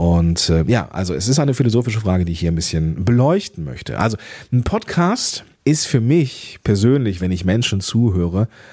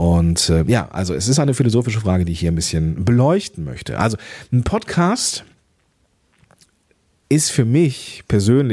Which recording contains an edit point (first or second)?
first